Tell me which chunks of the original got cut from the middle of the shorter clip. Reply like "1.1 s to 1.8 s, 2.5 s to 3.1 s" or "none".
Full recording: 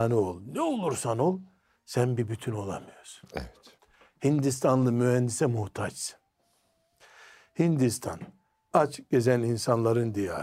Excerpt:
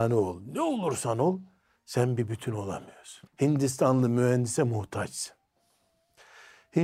3.3 s to 4.1 s

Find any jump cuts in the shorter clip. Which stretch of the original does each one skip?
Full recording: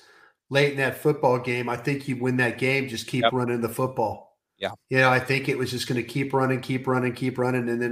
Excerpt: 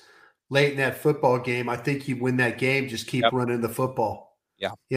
none

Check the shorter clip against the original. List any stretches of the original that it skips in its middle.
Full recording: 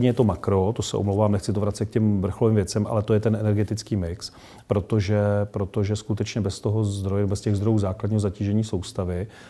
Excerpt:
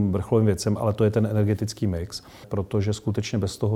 4.5 s to 5.5 s

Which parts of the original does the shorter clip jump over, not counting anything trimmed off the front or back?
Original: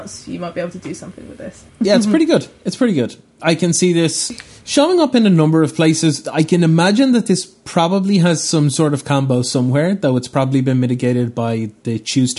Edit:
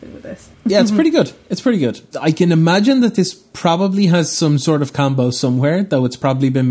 3.3 s to 6.2 s

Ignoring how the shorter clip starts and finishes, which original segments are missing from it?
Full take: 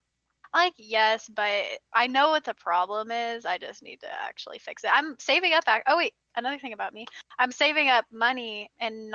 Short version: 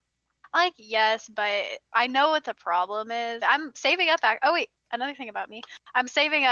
3.4 s to 4.9 s

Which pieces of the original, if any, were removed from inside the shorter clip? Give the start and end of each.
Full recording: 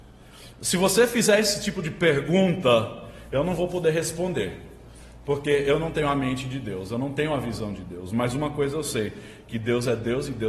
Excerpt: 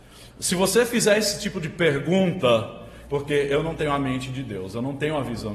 3.3 s to 5.2 s

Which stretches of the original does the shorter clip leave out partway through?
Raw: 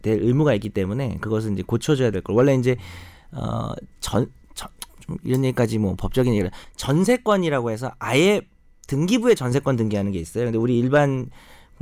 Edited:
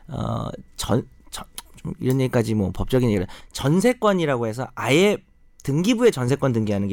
none

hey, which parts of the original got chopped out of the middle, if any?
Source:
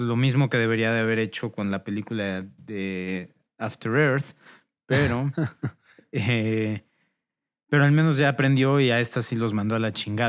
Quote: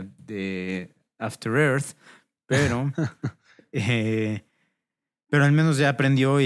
none

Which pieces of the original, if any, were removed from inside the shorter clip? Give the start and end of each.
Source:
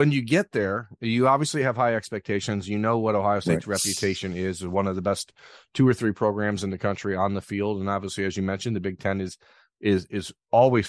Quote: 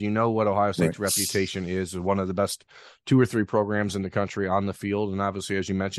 none

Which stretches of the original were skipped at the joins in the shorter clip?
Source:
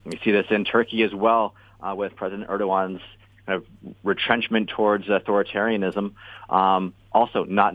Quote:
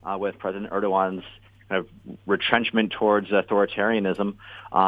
none

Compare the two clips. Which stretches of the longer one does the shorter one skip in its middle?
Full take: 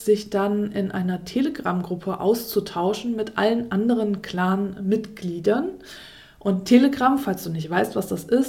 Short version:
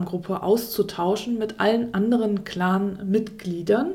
none

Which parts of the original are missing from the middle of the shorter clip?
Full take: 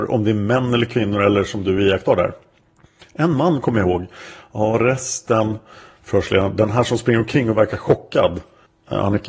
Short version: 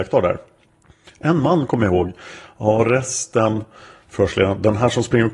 none

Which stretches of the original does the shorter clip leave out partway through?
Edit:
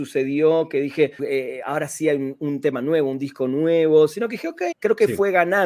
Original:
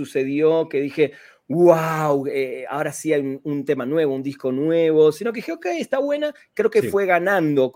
1.2 s to 2.2 s, 5.7 s to 6.5 s

